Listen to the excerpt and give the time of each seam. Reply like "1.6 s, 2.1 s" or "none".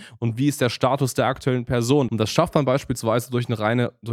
2.1 s